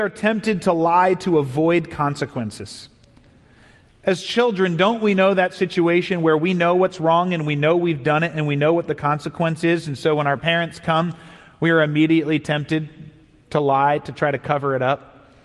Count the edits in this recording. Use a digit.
0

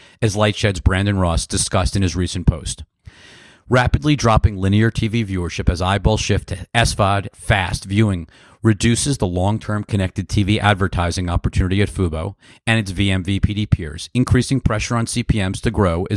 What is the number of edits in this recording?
1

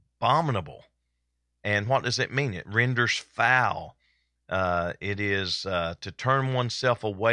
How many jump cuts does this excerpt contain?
0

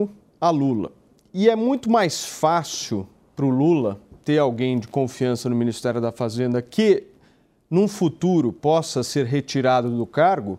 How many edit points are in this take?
0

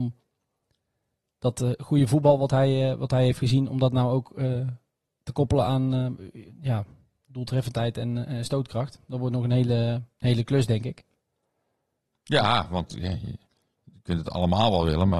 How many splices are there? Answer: 0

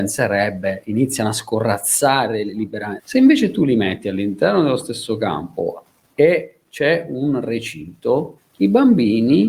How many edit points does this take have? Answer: 2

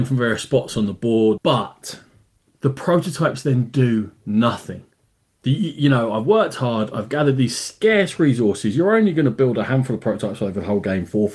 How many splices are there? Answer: 1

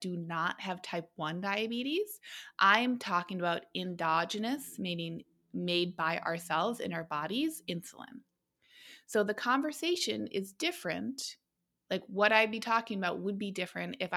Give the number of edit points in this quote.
0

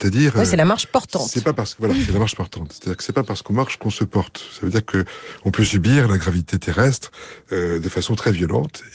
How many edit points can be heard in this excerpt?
0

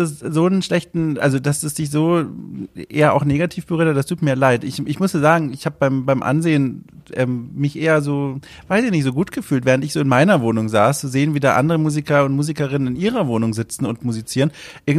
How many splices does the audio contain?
0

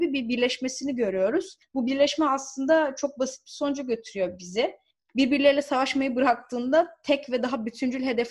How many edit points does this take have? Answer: 0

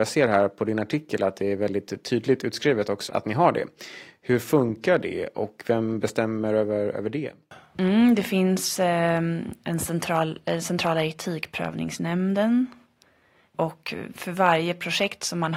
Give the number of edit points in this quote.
1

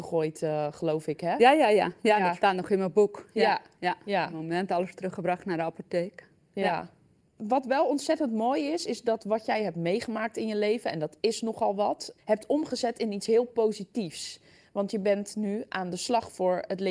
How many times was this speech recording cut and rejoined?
1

